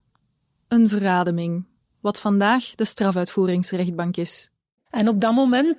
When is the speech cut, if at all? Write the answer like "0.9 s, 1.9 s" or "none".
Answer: 1.9 s